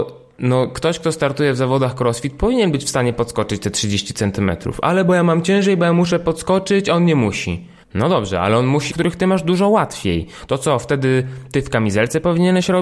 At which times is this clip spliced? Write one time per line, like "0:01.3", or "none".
0:07.8
0:08.9

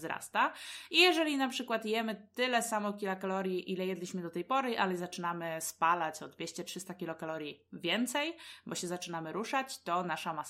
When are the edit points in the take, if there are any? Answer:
none

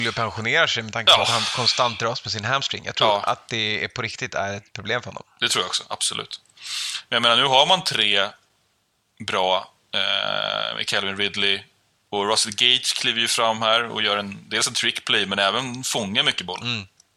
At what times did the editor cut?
none

